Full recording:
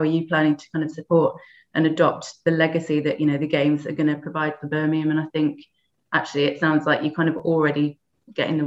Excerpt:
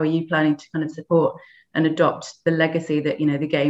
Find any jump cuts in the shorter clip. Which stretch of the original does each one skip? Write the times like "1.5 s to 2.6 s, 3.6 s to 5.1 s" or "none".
none